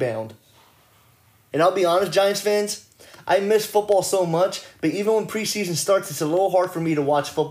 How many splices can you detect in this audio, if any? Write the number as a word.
one